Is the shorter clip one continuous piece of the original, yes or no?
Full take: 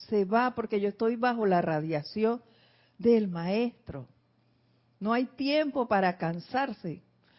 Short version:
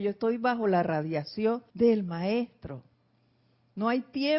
no